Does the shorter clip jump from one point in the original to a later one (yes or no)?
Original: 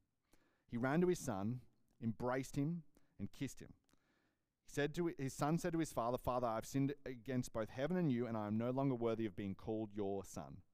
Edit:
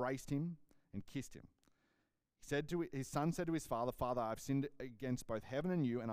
no